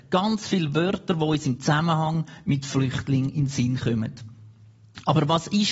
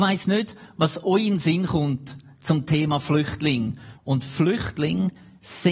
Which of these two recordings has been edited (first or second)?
second